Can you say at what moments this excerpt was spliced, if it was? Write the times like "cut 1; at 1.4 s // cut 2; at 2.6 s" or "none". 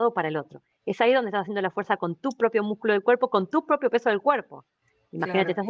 none